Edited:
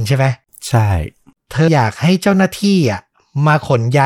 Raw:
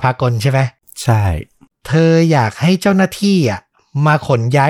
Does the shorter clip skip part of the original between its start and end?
yes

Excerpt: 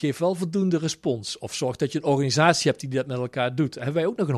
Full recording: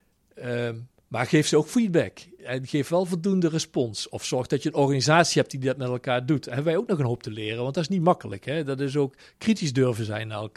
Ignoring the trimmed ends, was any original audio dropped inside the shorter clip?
no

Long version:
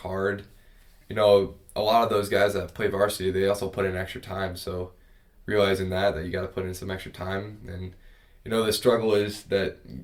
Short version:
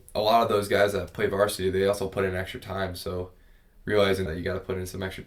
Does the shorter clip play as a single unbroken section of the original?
no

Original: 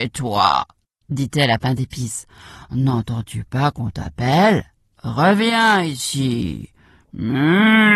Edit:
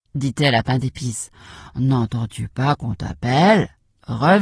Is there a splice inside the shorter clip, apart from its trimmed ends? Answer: no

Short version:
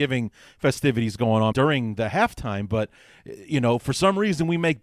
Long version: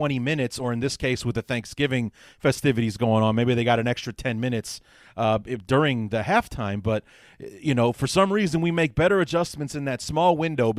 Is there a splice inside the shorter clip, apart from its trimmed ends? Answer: yes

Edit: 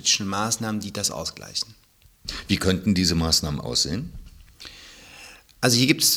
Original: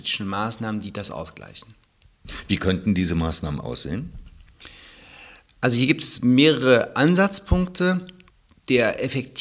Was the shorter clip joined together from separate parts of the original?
no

